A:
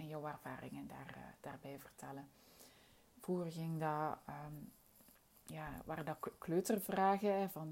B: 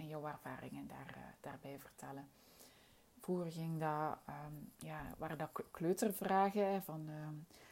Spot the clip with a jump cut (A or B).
B